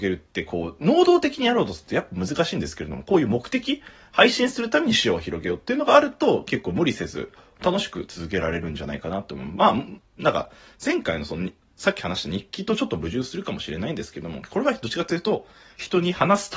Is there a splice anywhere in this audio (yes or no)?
no